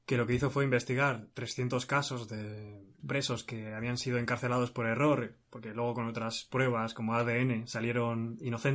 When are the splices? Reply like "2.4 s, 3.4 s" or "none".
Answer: none